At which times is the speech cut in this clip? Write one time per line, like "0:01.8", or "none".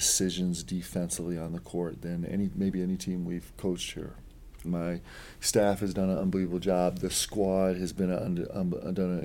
0:04.6